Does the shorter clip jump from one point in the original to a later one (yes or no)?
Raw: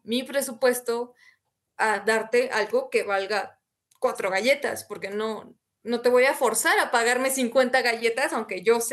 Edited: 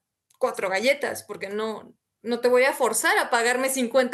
no